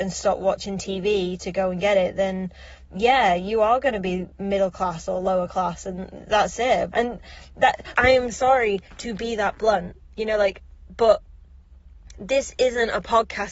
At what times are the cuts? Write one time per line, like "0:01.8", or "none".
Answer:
0:06.9
0:08.0